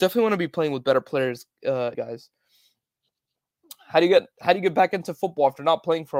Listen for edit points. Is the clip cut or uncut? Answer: cut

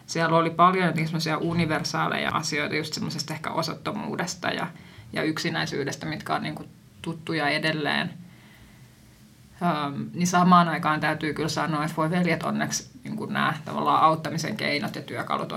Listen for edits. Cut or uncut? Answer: uncut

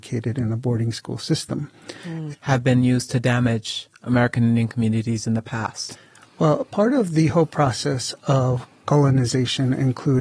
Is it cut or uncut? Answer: cut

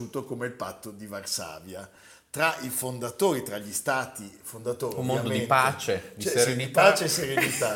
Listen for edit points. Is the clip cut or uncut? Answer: uncut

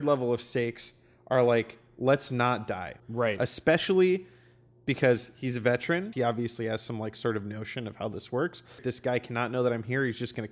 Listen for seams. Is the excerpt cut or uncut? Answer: cut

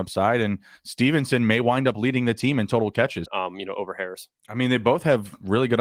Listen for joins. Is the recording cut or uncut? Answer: cut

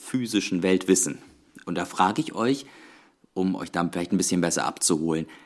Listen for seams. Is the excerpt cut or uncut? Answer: uncut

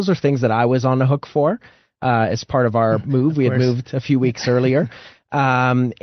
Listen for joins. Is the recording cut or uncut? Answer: uncut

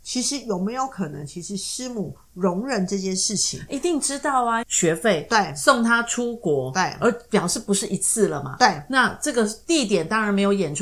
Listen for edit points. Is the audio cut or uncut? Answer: cut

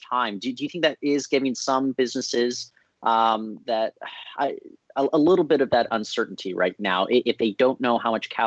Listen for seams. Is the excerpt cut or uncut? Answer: uncut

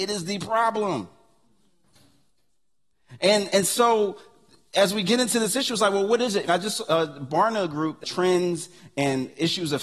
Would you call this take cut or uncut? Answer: cut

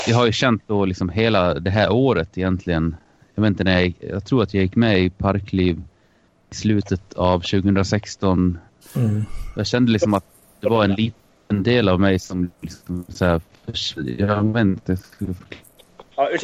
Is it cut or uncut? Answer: cut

